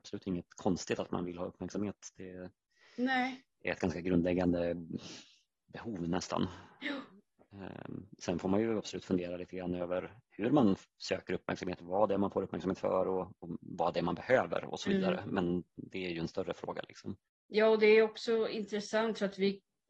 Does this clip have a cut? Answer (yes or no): no